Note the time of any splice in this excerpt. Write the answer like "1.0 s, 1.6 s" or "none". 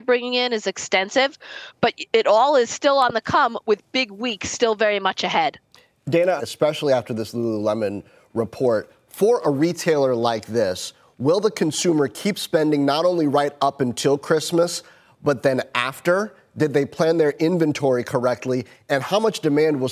6.4 s